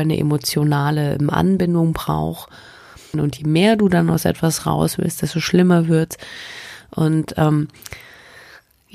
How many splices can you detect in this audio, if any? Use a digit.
1